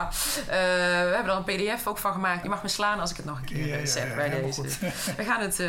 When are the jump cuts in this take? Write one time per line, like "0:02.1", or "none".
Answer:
0:02.4